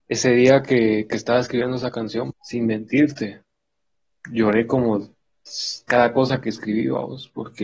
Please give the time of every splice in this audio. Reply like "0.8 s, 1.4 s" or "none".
2.3 s, 5.9 s